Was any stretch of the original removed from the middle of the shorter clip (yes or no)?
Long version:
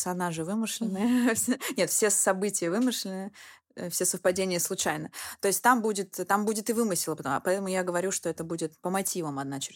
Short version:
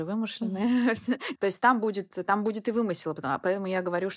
yes